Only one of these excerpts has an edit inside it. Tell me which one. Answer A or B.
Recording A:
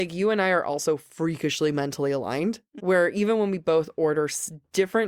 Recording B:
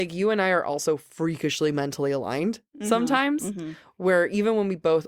A